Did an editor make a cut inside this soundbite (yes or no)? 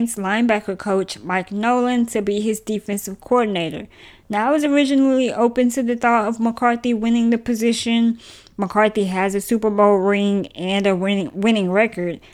no